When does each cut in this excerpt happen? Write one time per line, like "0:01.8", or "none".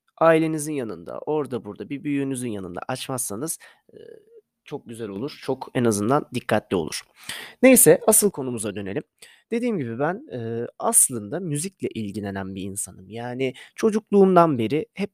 none